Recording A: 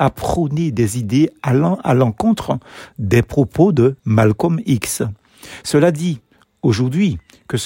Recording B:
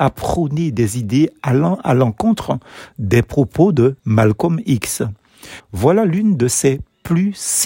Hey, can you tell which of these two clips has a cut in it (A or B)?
B